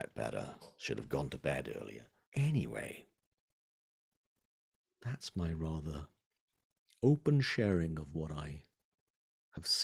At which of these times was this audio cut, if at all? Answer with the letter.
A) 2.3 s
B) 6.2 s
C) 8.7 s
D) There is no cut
A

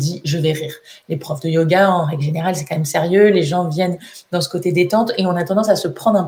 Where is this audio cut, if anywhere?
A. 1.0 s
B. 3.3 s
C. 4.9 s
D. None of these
D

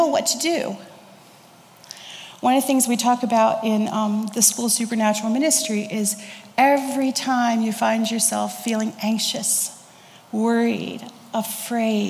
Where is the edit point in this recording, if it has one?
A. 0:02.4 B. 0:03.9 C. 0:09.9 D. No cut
D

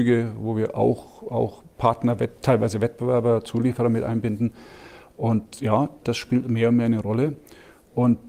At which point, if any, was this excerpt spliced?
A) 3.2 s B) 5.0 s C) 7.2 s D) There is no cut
D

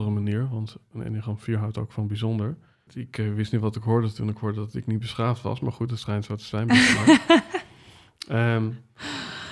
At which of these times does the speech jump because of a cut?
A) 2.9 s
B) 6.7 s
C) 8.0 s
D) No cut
A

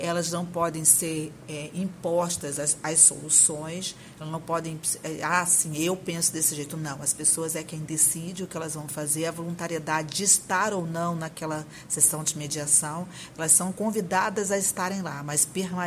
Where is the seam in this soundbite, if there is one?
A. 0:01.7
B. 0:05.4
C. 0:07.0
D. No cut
D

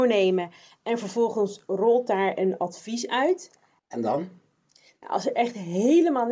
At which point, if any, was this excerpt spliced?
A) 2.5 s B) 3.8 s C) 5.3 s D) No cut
B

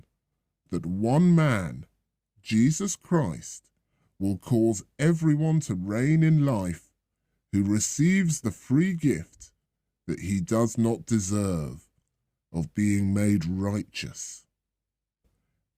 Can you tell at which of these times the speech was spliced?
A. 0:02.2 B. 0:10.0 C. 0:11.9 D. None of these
D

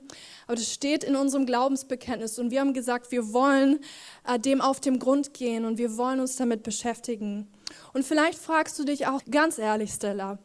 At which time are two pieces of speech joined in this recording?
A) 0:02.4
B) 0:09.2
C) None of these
B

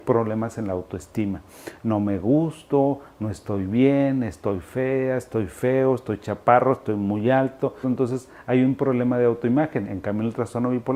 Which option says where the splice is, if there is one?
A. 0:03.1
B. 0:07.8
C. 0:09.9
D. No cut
B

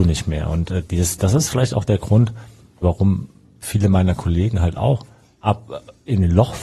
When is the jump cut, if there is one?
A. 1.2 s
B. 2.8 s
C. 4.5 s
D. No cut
B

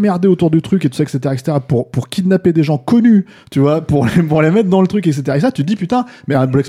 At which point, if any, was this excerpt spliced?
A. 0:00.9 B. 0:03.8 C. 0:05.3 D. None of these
D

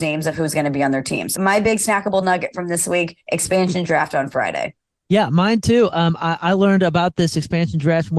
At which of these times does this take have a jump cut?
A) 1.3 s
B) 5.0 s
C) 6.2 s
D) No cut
A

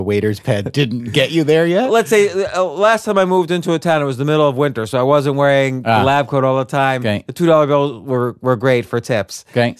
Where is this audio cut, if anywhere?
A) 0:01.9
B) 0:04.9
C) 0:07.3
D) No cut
D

